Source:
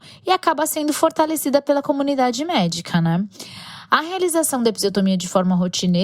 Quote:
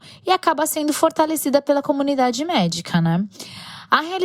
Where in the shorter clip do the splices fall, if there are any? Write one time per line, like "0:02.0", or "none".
none